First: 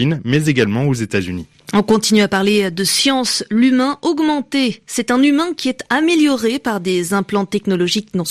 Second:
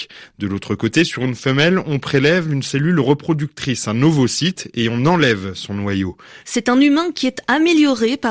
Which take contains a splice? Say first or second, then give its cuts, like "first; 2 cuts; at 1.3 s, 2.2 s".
second; 1 cut; at 6.4 s